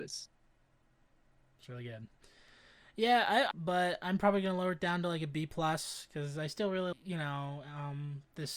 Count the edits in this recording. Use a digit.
2